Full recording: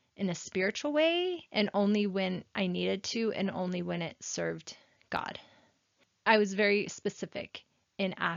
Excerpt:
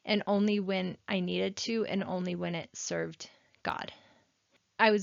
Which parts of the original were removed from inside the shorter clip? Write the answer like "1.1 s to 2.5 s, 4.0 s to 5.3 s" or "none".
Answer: none